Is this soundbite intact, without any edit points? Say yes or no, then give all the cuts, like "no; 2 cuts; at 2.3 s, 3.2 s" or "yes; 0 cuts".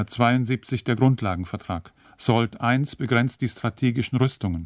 no; 1 cut; at 2.0 s